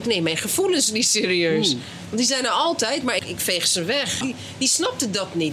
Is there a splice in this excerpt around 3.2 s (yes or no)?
yes